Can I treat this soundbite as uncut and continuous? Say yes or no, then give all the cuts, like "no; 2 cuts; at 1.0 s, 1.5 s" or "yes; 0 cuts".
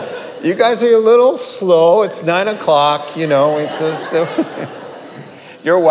yes; 0 cuts